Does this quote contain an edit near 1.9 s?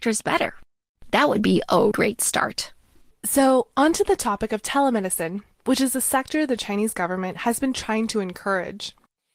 yes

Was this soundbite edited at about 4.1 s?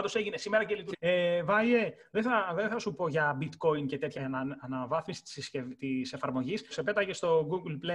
yes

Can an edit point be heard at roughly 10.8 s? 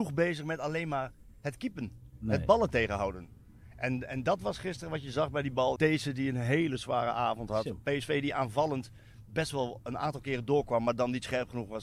no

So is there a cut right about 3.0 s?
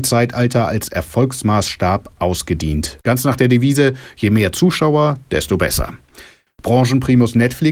yes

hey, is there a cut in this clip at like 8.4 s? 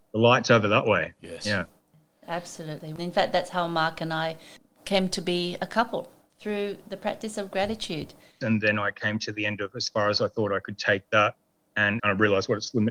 yes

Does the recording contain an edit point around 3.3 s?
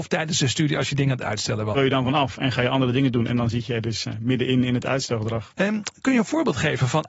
no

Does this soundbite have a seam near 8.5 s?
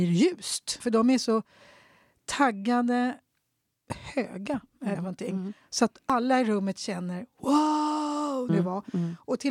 yes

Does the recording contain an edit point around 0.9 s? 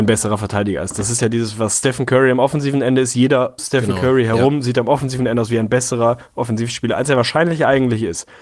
no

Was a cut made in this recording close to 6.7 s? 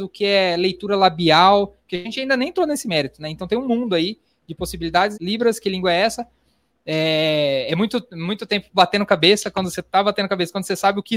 yes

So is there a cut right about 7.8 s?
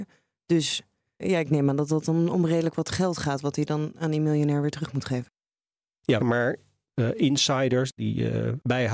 no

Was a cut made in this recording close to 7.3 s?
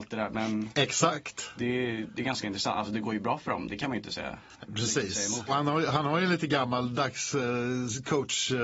no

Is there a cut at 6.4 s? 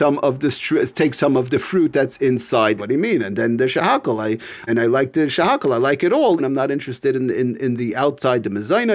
yes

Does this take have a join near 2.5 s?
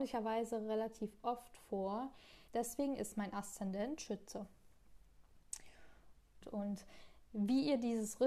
yes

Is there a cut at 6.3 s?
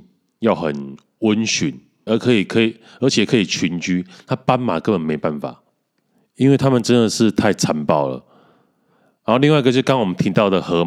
no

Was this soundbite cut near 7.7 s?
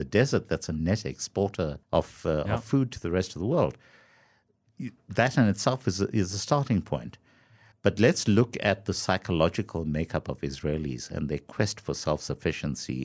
yes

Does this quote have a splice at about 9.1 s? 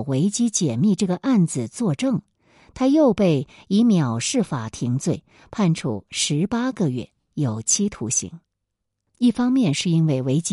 yes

